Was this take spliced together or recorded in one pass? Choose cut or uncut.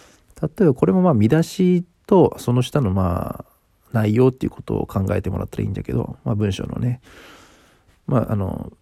uncut